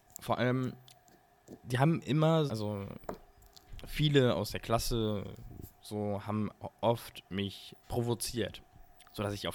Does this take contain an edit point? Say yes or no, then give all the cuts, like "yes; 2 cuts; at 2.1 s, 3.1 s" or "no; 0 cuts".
yes; 2 cuts; at 2.5 s, 7.8 s